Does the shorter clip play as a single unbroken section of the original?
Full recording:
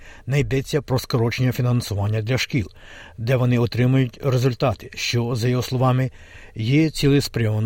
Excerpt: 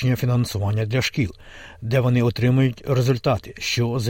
yes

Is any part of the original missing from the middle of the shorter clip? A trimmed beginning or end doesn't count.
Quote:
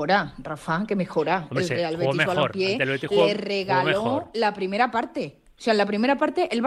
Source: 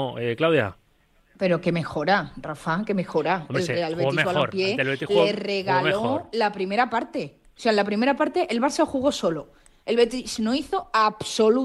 no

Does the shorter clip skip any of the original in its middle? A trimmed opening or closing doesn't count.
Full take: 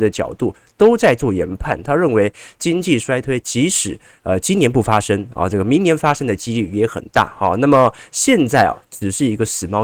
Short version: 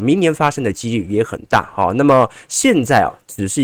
no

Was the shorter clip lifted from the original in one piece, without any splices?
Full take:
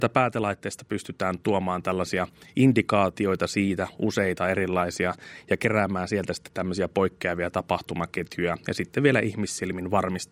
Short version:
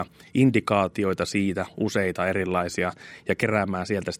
yes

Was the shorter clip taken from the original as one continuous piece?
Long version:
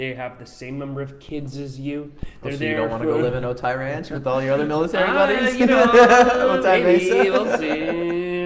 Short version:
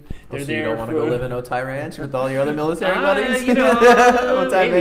yes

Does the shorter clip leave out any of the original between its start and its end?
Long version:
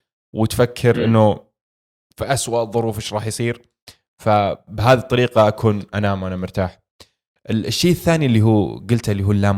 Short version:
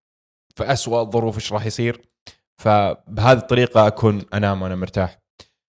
no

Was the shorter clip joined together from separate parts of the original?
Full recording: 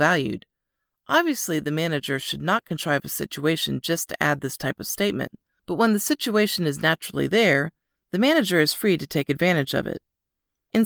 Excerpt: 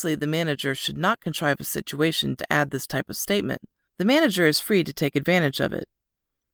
yes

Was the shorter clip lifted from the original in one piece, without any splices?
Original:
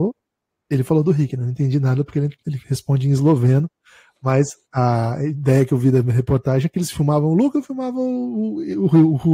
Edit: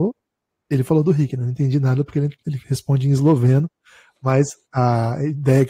yes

